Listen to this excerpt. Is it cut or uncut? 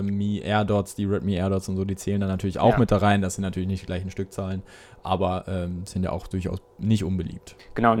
uncut